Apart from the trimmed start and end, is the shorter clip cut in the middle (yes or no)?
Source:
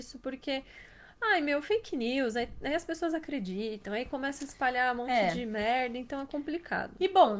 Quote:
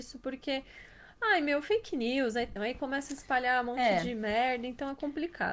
yes